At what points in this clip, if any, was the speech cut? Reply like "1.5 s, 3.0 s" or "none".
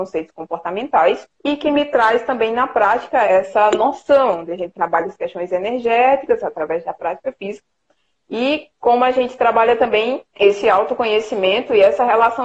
1.3 s, 3.2 s, 10.3 s